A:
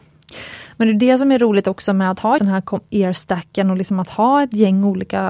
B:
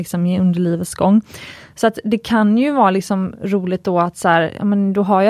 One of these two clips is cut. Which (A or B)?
A